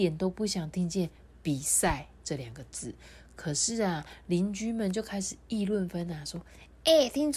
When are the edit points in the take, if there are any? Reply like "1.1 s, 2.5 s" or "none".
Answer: 5.9 s